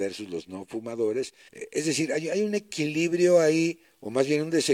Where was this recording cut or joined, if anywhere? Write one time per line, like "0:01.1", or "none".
0:01.5